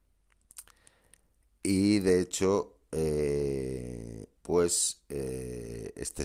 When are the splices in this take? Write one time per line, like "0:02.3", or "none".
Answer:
0:04.4